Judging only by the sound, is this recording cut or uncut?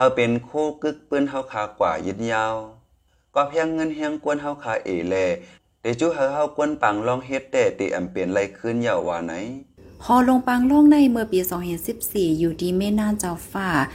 uncut